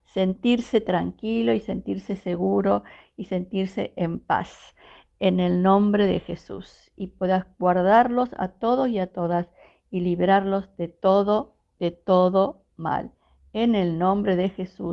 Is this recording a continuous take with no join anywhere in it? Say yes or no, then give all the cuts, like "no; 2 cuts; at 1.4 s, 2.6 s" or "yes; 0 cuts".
yes; 0 cuts